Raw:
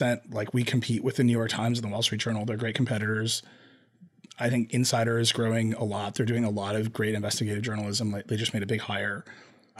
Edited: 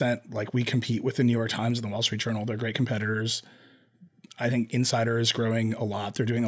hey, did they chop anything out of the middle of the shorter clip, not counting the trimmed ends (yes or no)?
no